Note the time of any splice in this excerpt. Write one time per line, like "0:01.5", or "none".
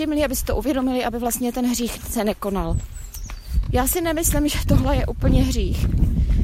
none